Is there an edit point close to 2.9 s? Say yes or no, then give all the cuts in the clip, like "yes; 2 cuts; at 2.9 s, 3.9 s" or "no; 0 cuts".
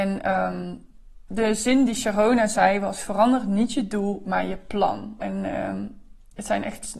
no; 2 cuts; at 1.3 s, 5.2 s